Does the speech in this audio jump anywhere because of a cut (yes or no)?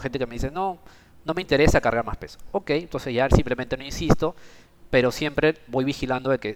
no